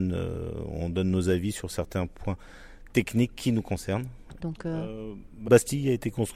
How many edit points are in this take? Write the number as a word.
two